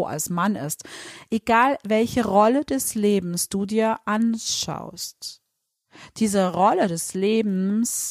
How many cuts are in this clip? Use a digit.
0